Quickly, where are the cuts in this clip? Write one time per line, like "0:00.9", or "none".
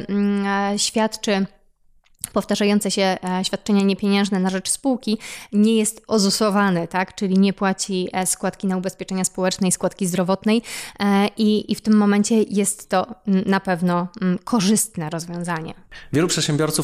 none